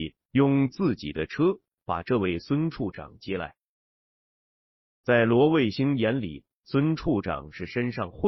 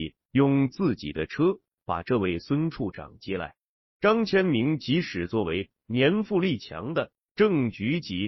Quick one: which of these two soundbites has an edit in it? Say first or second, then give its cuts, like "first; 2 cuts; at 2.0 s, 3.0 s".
second; 1 cut; at 3.8 s